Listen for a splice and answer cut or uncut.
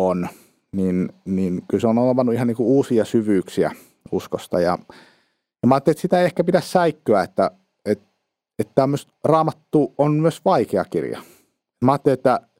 uncut